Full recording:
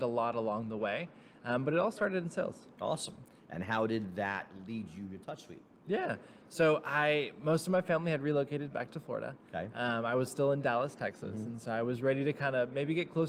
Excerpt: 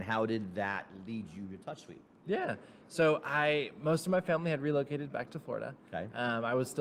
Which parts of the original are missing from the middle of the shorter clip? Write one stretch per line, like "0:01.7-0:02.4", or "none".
none

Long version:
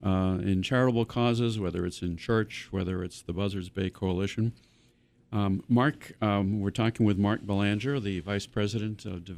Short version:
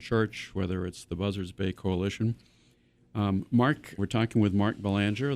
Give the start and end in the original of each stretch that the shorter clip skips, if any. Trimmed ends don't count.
0:06.2-0:06.6

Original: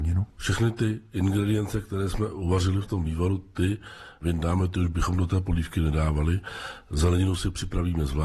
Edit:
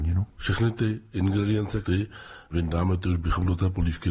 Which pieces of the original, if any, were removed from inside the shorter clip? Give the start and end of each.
0:01.8-0:03.5

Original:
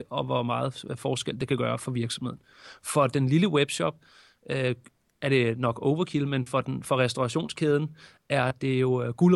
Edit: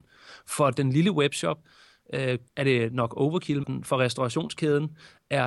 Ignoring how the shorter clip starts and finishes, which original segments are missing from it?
0:04.8-0:05.1
0:06.3-0:06.6

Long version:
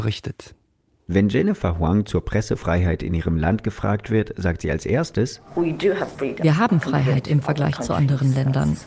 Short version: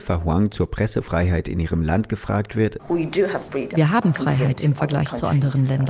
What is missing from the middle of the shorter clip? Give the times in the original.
0:04.3-0:05.5

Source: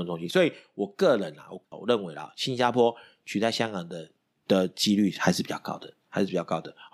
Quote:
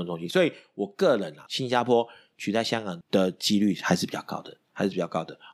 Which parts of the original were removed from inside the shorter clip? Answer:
0:01.5-0:02.3
0:03.9-0:04.4

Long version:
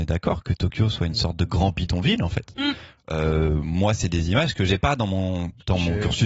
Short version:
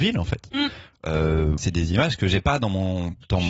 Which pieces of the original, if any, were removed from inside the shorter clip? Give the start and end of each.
0:03.6-0:04.0

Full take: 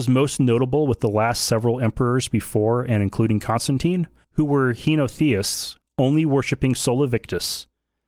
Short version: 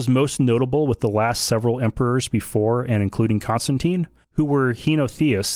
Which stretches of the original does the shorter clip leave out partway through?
none

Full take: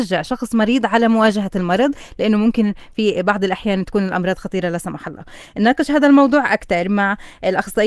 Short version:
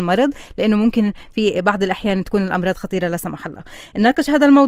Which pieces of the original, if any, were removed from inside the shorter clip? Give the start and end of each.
none

